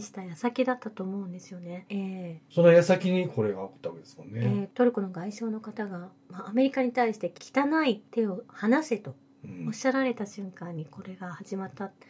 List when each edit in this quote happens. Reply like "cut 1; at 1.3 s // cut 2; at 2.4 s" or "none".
cut 1; at 1.9 s

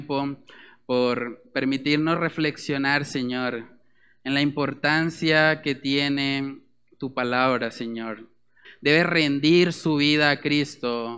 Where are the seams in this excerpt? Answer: cut 1; at 8.6 s

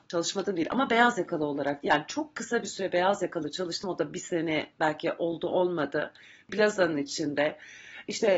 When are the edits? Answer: none

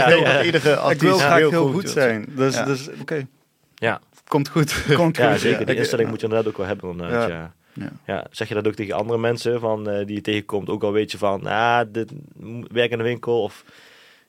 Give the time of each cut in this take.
cut 1; at 3.0 s

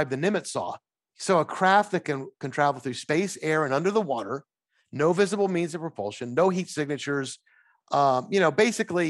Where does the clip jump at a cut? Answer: none

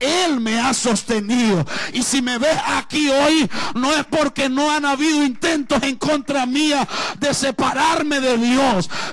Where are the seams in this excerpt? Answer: none

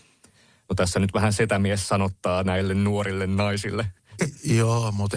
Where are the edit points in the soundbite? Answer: cut 1; at 4.2 s

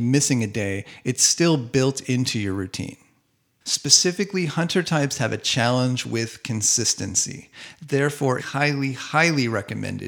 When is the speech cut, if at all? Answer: cut 1; at 3.6 s // cut 2; at 8.4 s

